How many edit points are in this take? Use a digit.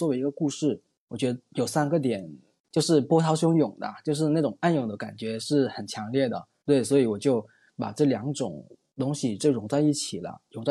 1